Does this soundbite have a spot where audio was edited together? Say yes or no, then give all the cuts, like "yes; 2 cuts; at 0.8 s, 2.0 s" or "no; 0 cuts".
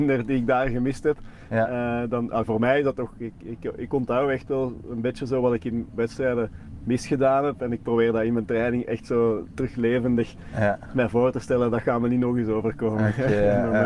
no; 0 cuts